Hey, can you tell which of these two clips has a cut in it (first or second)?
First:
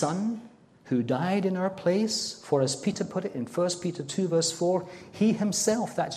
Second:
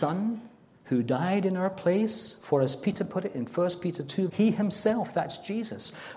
second